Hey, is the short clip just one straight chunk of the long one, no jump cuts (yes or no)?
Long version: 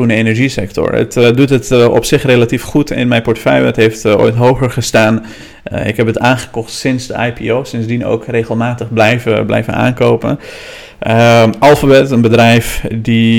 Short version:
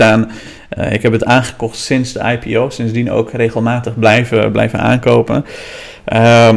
yes